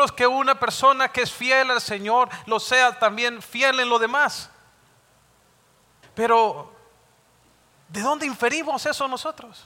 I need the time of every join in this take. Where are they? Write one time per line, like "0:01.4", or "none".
0:06.0